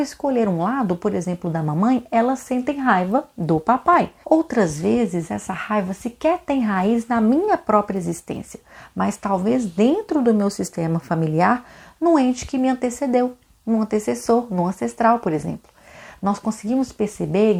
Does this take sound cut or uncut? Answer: cut